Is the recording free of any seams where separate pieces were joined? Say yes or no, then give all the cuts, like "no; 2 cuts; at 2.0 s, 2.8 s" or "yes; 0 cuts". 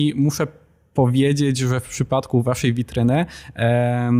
yes; 0 cuts